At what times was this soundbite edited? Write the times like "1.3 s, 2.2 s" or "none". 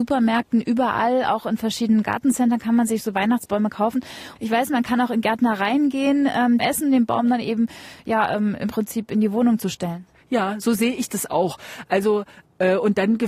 4.4 s, 6.6 s